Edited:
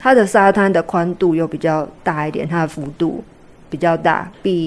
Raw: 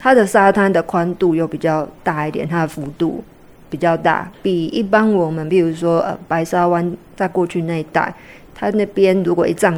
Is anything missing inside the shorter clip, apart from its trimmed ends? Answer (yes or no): no